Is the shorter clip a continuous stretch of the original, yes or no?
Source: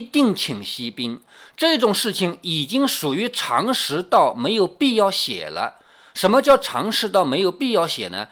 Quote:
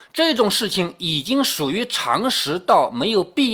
yes